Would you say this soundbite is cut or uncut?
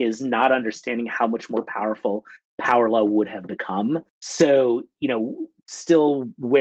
cut